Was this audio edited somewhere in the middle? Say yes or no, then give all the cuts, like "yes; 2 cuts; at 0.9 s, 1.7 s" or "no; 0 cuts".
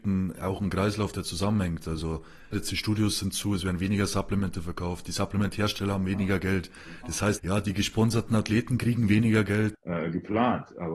yes; 3 cuts; at 2.5 s, 7.4 s, 9.7 s